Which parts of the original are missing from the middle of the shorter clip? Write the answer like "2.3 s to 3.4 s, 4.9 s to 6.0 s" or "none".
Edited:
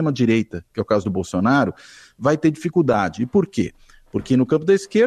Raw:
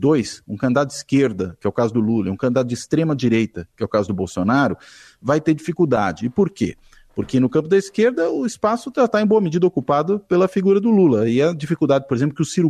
none